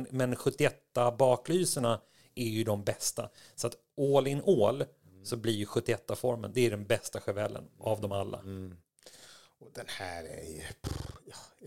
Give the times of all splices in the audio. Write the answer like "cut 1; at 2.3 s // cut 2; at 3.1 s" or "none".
none

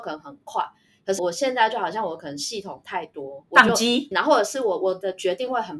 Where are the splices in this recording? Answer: cut 1; at 1.2 s // cut 2; at 4.1 s

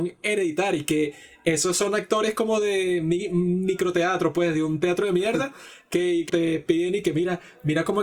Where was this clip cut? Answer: cut 1; at 6.3 s

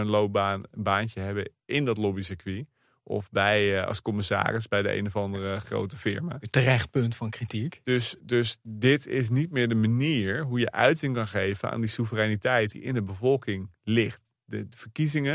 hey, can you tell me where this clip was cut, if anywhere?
cut 1; at 8.2 s

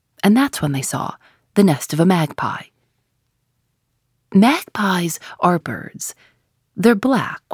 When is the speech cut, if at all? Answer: cut 1; at 5.6 s

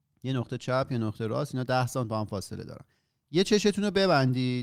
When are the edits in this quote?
none

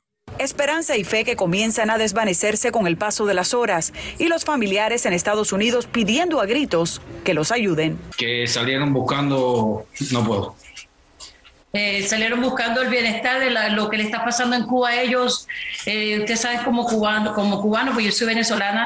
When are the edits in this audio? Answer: none

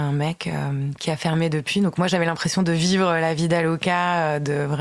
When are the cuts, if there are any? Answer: cut 1; at 1.0 s

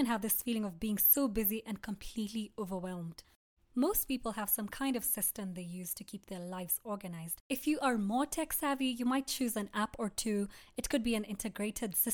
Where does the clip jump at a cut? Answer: cut 1; at 3.6 s

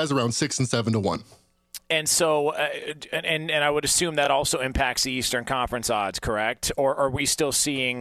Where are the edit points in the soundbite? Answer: none

